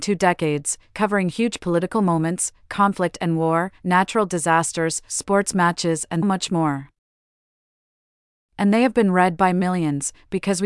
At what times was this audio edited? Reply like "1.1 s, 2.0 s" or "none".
6.2 s